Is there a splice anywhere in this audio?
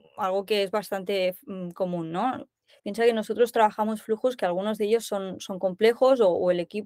yes; 1 cut; at 2.8 s

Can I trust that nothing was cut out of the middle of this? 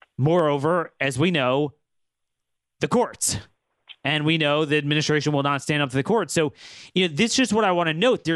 yes; 0 cuts

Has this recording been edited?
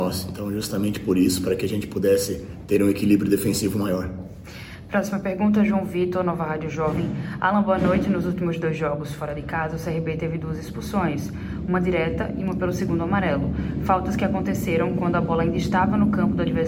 no; 0 cuts

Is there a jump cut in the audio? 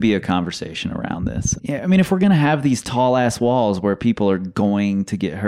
yes; 1 cut; at 1.6 s

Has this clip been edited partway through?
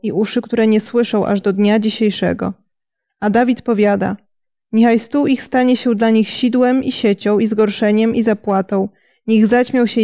no; 0 cuts

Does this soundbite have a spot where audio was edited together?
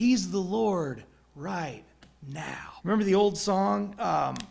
yes; 1 cut; at 2.8 s

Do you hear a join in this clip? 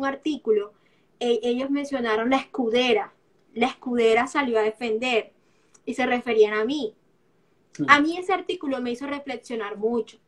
no; 0 cuts

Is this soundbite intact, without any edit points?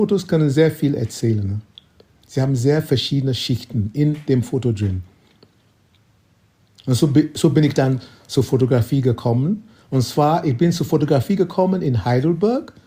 yes; 0 cuts

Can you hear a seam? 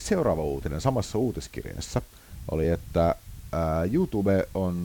no; 0 cuts

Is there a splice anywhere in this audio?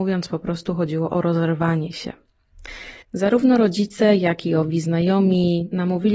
yes; 1 cut; at 3.0 s

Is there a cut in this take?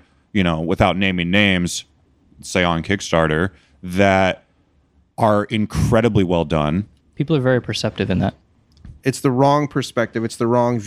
yes; 3 cuts; at 2.2 s, 7.0 s, 9.0 s

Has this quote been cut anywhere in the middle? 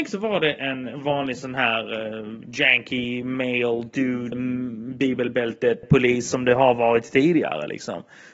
yes; 2 cuts; at 4.3 s, 5.8 s

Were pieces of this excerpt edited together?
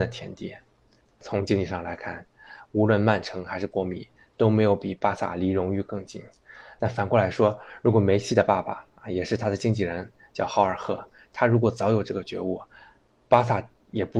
yes; 1 cut; at 6.8 s

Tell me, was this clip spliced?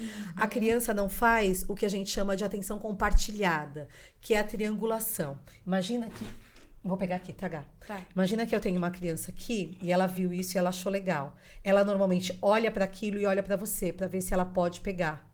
no; 0 cuts

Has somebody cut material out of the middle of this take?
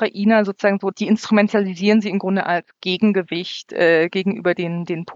yes; 1 cut; at 0.9 s

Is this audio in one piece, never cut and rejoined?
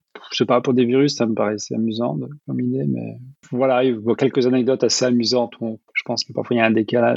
no; 1 cut; at 5.9 s

